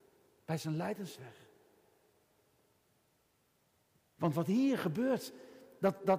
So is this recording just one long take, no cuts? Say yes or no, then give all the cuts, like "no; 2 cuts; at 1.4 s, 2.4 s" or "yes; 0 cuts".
no; 1 cut; at 4.2 s